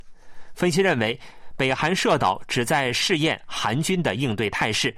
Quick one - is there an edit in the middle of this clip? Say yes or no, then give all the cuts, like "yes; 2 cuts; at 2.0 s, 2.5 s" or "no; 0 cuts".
no; 0 cuts